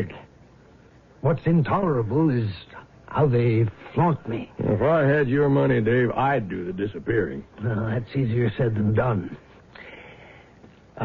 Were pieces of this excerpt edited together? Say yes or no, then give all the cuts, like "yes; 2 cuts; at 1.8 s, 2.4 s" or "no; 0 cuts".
no; 0 cuts